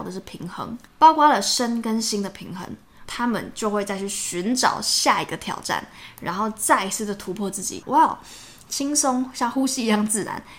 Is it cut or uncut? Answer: cut